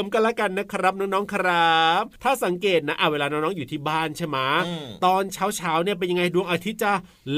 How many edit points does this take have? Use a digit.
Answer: 1